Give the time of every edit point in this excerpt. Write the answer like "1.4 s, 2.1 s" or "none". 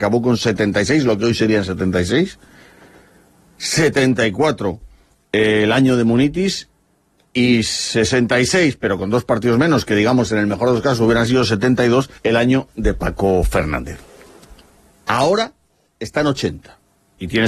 12.2 s